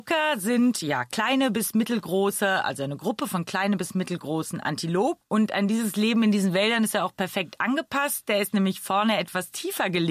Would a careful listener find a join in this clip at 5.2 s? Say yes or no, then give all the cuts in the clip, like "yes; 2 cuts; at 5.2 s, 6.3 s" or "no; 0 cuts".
yes; 1 cut; at 5.2 s